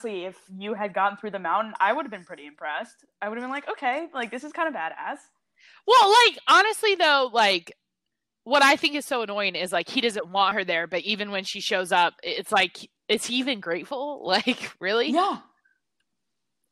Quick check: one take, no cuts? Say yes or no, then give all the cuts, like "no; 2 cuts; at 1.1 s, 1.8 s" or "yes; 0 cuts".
yes; 0 cuts